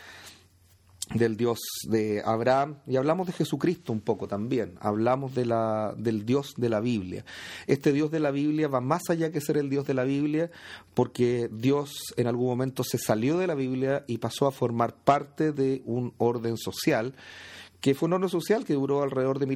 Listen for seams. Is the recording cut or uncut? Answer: uncut